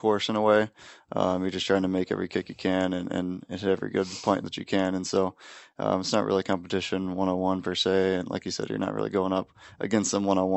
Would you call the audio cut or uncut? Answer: uncut